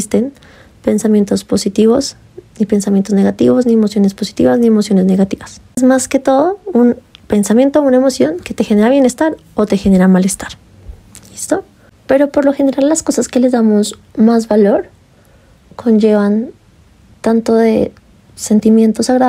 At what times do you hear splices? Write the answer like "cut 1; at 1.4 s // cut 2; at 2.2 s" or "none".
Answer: cut 1; at 12.0 s